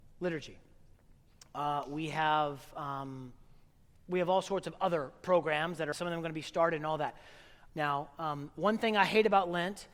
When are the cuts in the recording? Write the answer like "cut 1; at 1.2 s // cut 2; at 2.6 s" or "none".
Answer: cut 1; at 5.9 s // cut 2; at 7.7 s